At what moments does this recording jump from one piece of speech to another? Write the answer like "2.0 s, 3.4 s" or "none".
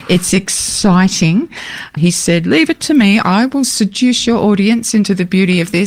2.0 s